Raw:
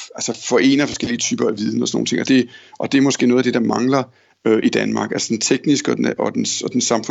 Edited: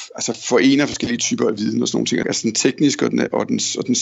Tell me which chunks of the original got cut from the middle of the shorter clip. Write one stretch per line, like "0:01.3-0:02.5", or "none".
0:02.2-0:05.1